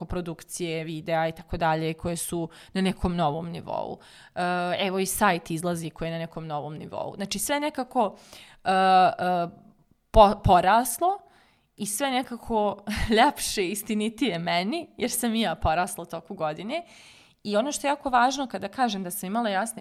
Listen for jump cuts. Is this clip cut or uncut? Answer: uncut